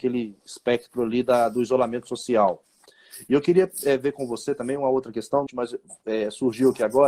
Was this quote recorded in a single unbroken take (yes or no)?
no